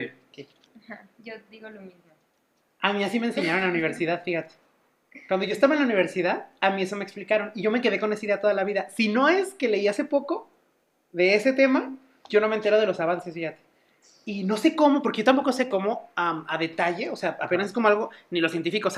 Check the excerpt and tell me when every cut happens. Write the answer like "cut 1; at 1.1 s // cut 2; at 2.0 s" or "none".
none